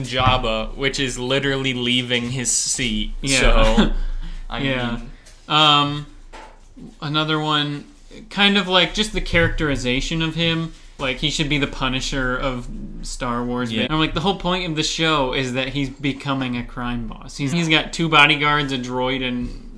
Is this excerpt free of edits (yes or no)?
no